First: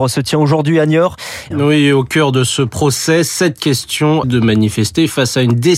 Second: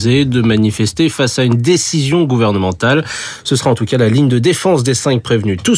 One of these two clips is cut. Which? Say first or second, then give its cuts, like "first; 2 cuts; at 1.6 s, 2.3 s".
first; 2 cuts; at 1.5 s, 4.2 s